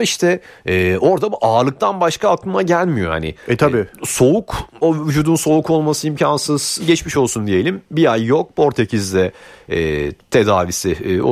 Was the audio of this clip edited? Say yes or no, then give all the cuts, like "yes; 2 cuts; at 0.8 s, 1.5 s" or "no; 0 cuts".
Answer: yes; 2 cuts; at 4.8 s, 6.8 s